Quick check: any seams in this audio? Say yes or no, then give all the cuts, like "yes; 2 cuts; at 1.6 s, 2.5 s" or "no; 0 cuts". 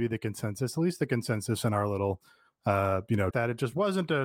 yes; 1 cut; at 3.3 s